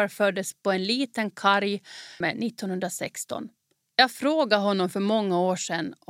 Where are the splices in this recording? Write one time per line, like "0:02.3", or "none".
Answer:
0:02.2
0:03.8